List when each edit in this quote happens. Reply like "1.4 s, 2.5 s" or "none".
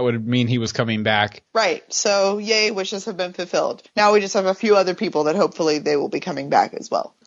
none